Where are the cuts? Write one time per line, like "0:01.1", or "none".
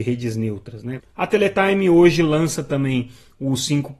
0:01.0